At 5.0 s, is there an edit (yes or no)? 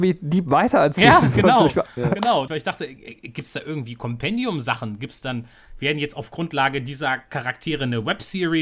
no